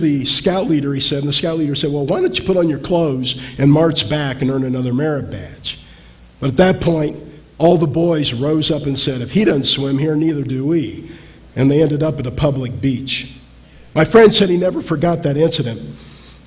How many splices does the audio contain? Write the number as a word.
zero